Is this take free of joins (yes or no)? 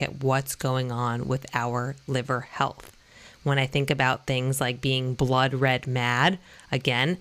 yes